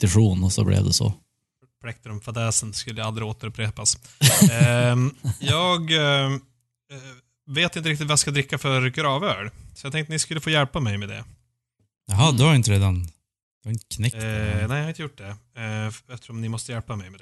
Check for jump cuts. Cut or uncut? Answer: uncut